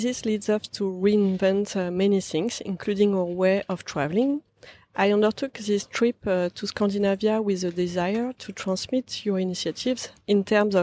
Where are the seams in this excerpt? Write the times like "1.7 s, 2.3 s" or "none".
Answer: none